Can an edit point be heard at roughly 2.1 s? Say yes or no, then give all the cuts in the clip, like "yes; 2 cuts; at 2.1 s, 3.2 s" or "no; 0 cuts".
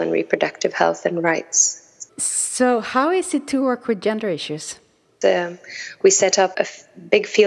yes; 3 cuts; at 2.1 s, 5.2 s, 6.5 s